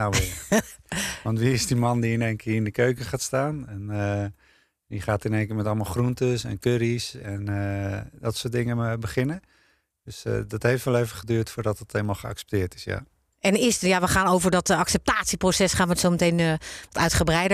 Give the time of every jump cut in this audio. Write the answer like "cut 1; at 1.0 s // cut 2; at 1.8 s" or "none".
none

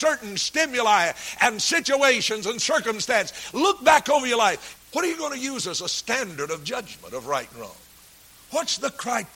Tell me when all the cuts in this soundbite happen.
cut 1; at 4.8 s

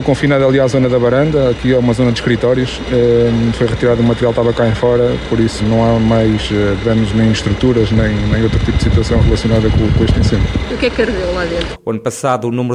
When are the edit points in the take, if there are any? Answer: cut 1; at 5.6 s // cut 2; at 10.7 s // cut 3; at 11.7 s

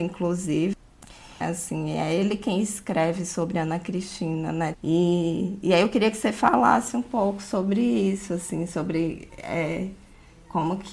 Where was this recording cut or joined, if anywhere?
cut 1; at 1.4 s // cut 2; at 4.7 s

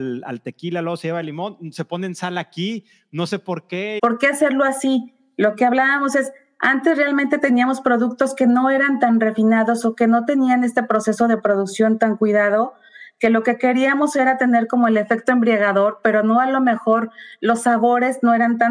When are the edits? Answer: cut 1; at 4.0 s

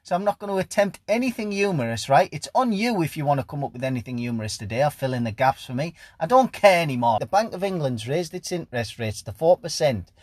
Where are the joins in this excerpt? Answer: cut 1; at 7.2 s

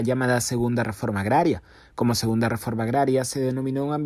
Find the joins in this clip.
none

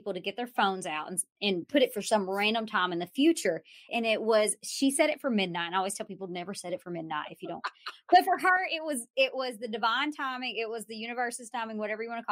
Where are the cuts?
cut 1; at 3.9 s

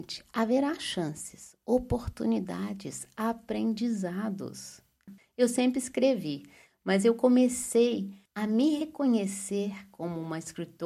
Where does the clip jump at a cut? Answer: cut 1; at 5.2 s // cut 2; at 8.3 s

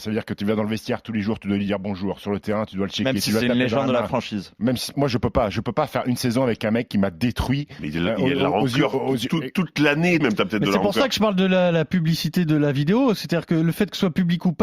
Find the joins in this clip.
cut 1; at 4.9 s // cut 2; at 10.2 s

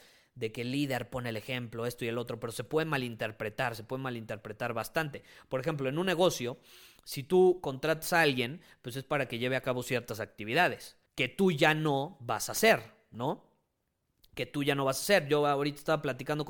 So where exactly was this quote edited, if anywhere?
cut 1; at 11.1 s

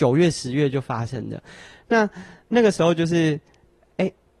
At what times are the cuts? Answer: none

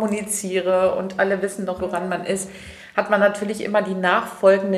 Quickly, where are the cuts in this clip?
cut 1; at 1.8 s

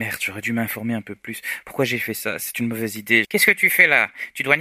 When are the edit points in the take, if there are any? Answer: cut 1; at 3.2 s

